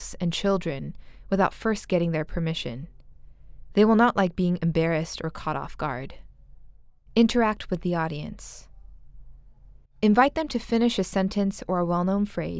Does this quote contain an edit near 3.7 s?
no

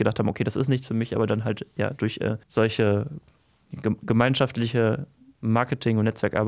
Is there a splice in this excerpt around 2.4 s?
yes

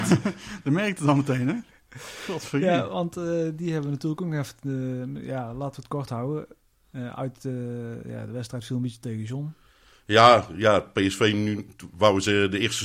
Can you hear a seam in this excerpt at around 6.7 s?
yes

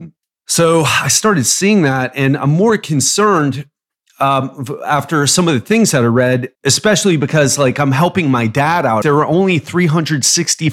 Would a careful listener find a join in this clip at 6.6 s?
yes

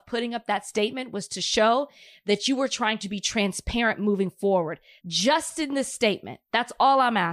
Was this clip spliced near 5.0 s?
yes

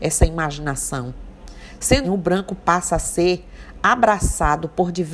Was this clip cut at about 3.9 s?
no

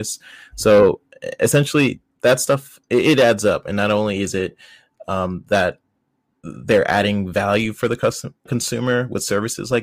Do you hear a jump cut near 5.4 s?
no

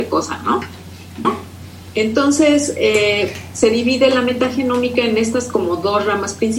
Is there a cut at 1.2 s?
yes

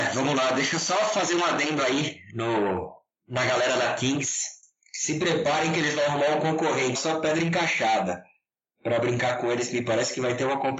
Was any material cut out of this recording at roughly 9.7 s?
no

